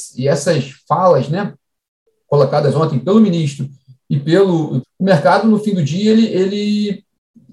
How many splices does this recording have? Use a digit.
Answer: 1